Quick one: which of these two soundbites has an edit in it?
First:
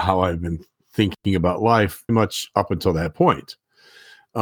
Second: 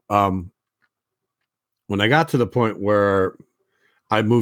first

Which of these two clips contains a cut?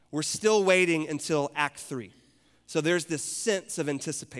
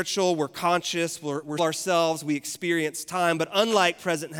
second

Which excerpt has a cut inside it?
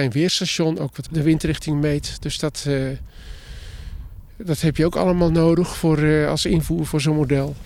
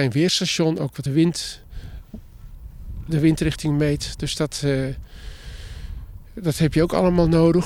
first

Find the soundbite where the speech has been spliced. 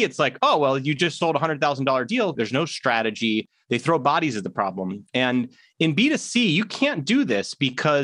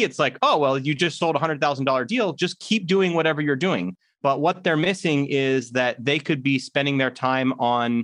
first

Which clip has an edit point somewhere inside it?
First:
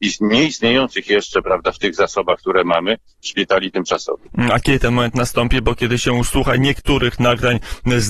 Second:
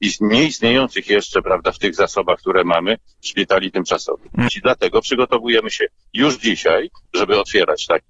second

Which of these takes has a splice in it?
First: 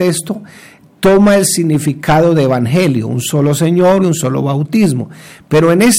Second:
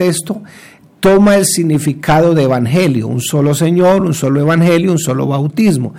first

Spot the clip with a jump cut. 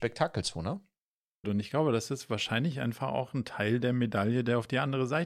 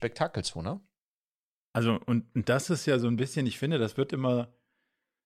first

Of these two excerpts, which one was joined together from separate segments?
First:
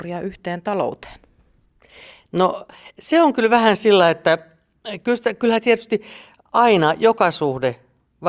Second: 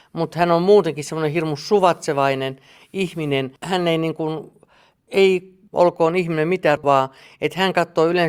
second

